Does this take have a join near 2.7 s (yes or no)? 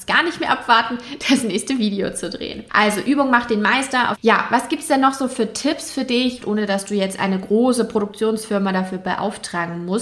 no